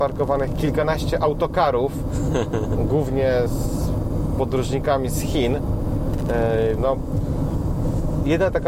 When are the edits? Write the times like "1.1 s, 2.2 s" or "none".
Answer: 3.5 s, 6.8 s